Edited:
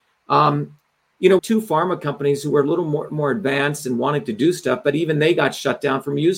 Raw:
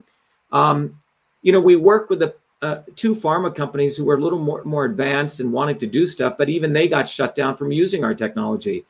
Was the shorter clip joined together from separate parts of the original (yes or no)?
yes